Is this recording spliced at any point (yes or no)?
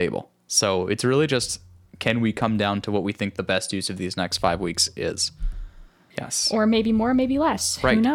yes